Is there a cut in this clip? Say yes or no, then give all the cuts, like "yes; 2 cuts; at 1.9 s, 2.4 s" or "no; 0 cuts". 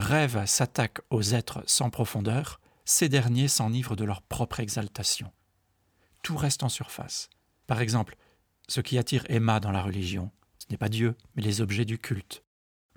no; 0 cuts